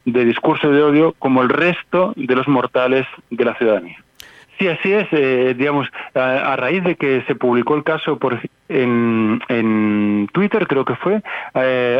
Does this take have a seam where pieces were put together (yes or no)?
yes